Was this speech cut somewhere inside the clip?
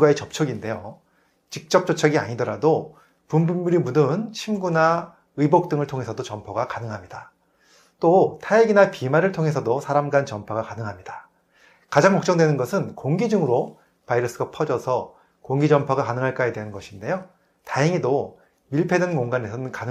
no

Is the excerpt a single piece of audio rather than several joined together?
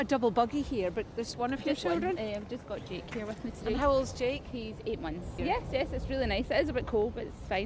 no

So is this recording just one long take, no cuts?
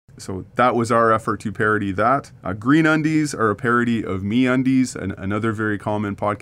no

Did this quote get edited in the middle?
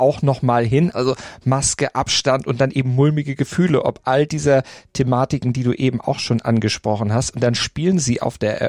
yes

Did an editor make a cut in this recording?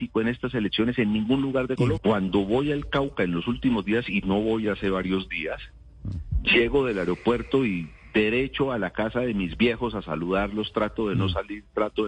yes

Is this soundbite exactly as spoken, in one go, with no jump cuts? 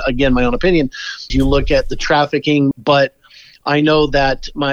no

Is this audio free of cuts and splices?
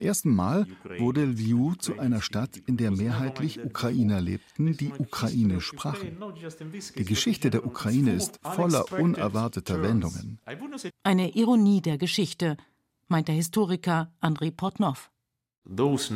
no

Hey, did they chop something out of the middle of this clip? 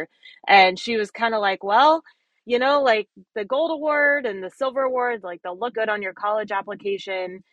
yes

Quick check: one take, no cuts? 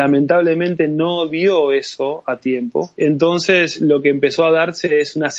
no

